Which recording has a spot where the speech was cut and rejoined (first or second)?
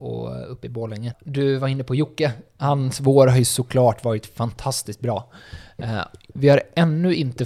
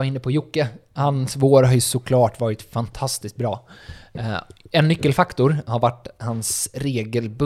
first